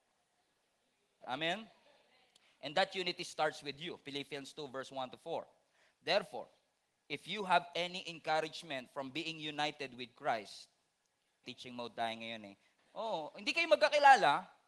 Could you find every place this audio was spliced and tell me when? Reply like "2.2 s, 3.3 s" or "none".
1.2 s, 11.4 s, 12.8 s